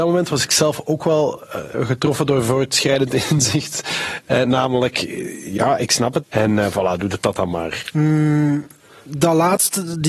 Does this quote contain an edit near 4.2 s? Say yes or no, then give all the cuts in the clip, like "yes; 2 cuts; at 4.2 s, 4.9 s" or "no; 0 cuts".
no; 3 cuts; at 1.7 s, 6.2 s, 7.9 s